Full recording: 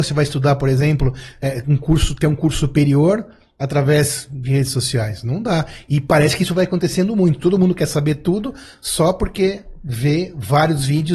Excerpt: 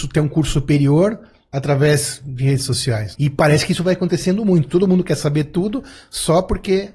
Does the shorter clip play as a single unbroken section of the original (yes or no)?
no